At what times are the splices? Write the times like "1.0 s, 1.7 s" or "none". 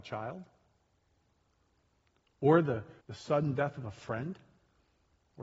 3.0 s